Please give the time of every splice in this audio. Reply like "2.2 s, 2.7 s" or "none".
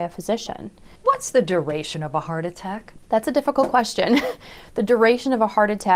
1.0 s